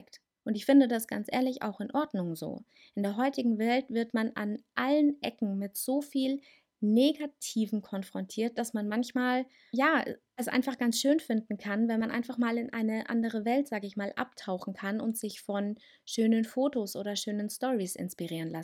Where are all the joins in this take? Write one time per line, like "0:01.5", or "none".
none